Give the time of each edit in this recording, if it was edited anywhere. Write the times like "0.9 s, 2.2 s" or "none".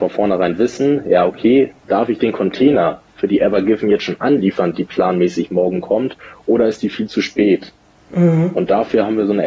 none